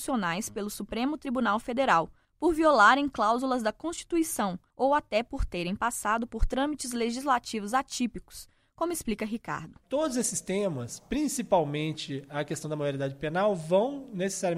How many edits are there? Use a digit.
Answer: 0